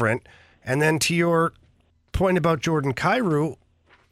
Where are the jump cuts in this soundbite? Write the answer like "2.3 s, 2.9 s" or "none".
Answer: none